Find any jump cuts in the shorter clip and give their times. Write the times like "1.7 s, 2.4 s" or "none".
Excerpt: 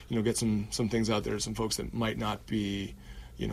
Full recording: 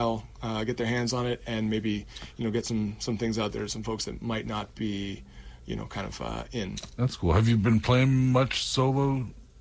none